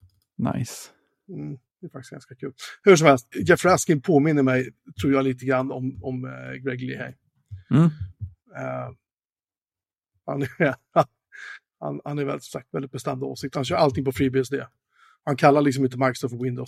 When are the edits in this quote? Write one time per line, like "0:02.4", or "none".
0:03.3